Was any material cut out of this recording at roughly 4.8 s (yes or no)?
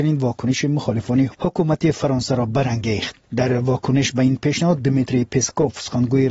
no